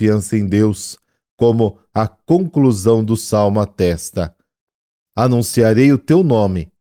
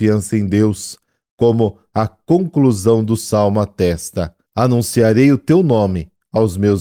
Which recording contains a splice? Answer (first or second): second